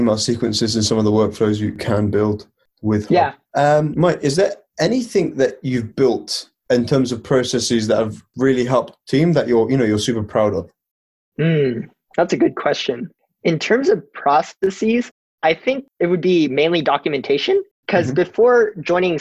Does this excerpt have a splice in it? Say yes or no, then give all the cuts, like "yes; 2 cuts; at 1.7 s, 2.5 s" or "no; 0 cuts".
yes; 1 cut; at 3.9 s